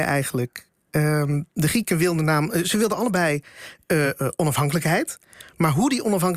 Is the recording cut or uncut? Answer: uncut